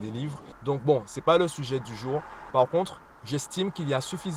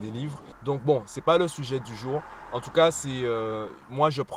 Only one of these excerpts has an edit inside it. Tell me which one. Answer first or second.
first